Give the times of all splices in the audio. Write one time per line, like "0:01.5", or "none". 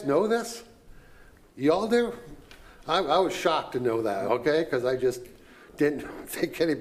none